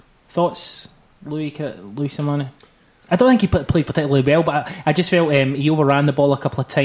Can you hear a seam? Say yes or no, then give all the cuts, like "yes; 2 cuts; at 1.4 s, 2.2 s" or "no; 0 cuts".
no; 0 cuts